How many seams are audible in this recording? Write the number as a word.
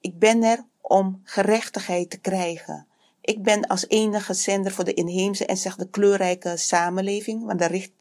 one